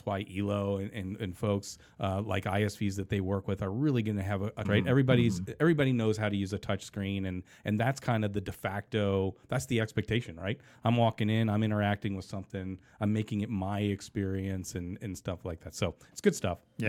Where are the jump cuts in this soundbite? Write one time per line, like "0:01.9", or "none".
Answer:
0:04.6